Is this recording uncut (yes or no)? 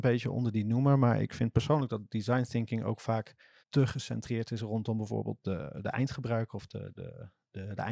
no